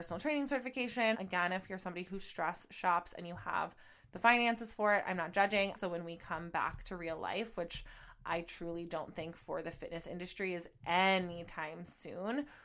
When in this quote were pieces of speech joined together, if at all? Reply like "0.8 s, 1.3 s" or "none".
1.1 s, 5.8 s